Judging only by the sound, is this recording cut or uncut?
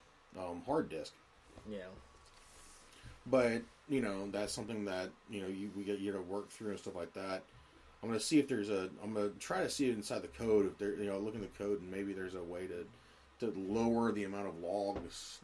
uncut